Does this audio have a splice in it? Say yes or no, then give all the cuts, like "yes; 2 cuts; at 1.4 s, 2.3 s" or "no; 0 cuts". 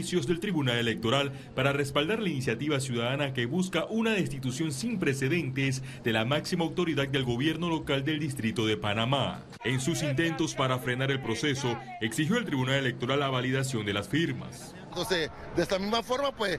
yes; 2 cuts; at 9.6 s, 14.9 s